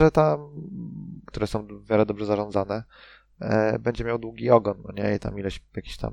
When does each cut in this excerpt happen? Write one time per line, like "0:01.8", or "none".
0:01.2